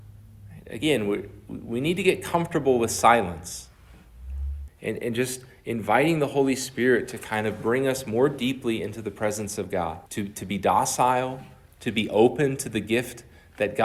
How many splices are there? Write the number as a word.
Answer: two